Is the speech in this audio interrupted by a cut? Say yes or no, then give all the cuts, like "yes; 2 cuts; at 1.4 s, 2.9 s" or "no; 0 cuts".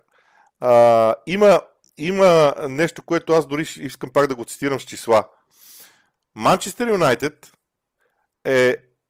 no; 0 cuts